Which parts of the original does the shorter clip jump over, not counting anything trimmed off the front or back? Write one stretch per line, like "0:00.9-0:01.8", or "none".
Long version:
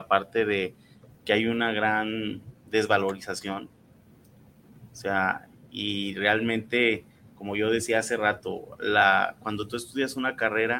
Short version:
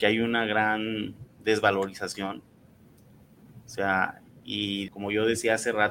0:06.1-0:07.3

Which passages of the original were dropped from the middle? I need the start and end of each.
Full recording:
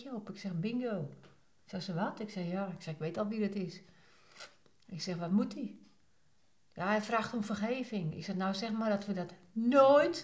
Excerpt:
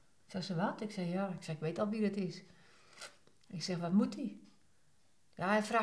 none

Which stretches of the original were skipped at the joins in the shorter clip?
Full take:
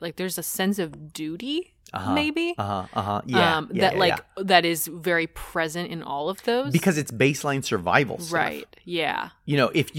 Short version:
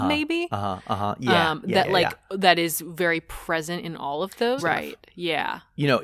0:06.6-0:08.3

